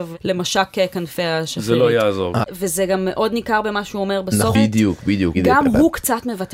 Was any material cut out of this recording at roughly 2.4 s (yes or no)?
yes